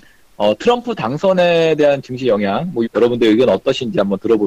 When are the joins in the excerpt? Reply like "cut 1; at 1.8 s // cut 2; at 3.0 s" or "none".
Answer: cut 1; at 2.8 s